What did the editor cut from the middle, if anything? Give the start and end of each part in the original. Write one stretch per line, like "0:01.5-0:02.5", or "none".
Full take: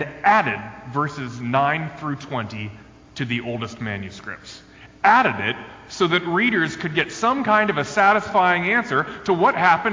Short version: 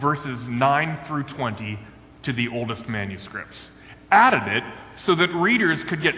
none